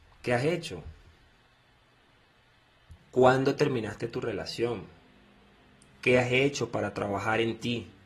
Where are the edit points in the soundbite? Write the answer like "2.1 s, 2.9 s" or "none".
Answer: 3.0 s

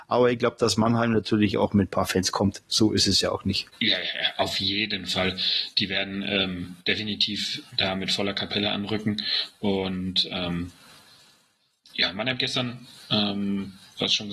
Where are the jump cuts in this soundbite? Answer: 3.7 s

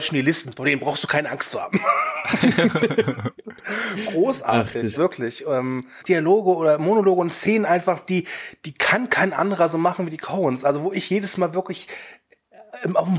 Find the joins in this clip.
5.0 s, 6.0 s

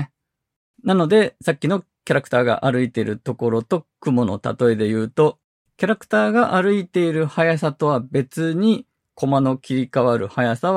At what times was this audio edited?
9.1 s

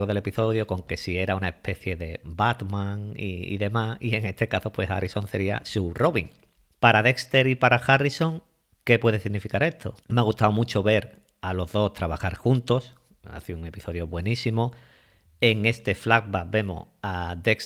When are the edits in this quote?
6.7 s, 10.0 s

